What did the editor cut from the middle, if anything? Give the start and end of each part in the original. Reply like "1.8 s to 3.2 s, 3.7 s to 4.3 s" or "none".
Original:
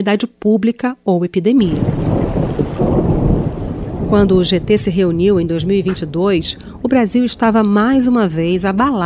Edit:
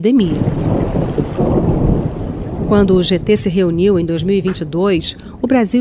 none